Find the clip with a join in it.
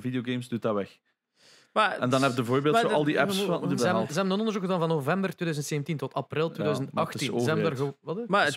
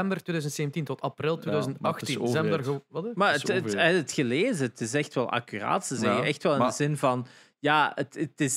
first; 1 cut; at 3.8 s

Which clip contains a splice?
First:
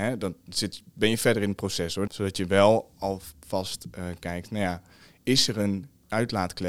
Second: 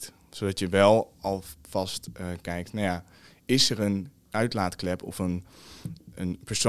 first; 1 cut; at 2.1 s

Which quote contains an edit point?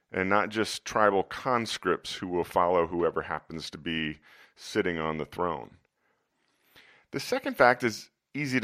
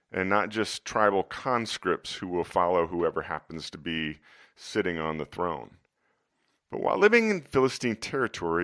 second; 1 cut; at 6.6 s

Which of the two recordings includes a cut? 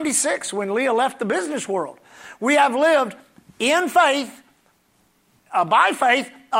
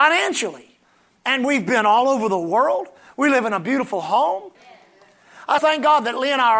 second; 2 cuts; at 4.5 s, 5.6 s

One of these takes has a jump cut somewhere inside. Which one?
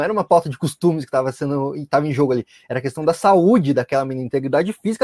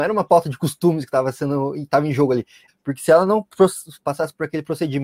second; 1 cut; at 2.7 s

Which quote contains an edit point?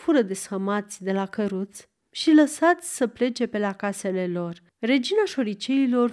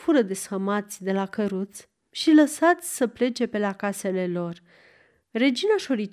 first; 1 cut; at 4.7 s

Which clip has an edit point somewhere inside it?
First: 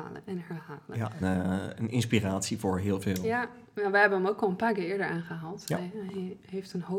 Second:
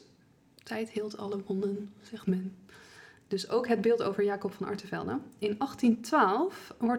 first; 1 cut; at 1.2 s

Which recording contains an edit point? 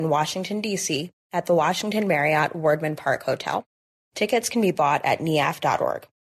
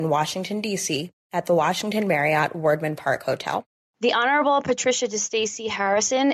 second; 1 cut; at 3.8 s

